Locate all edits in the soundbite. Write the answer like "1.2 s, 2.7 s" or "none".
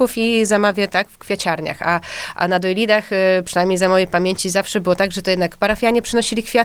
none